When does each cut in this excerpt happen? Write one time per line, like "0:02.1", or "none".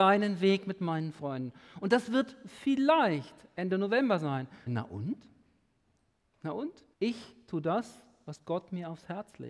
0:04.7
0:06.9